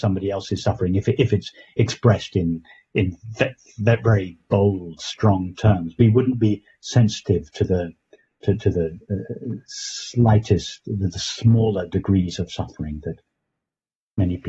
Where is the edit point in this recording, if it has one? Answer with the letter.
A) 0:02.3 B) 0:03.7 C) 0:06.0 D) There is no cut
D